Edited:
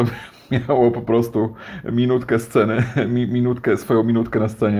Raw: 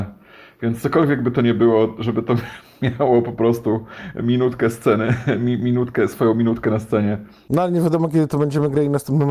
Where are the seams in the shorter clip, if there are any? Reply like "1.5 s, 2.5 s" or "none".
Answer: none